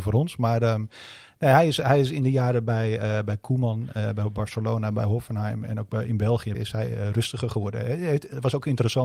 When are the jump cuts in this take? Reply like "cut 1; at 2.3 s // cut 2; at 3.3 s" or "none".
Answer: cut 1; at 6.5 s